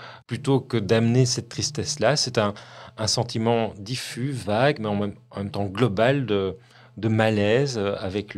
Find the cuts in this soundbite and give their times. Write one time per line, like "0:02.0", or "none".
none